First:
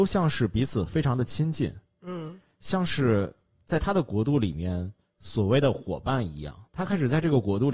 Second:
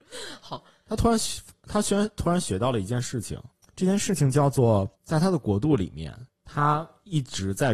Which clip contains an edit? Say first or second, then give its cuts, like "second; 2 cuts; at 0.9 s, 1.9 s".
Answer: second; 1 cut; at 4.9 s